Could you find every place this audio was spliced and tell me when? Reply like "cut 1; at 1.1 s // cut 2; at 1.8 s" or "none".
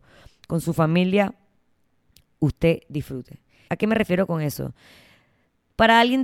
cut 1; at 3.7 s